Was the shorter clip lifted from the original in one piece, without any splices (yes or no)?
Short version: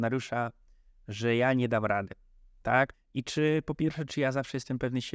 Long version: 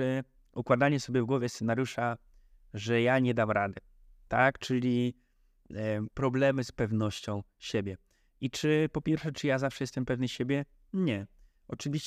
no